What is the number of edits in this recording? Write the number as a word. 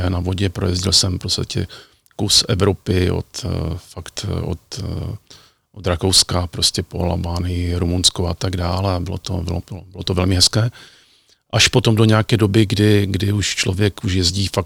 zero